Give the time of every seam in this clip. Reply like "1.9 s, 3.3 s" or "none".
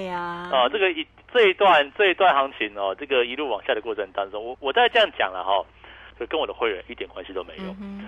4.5 s, 6.1 s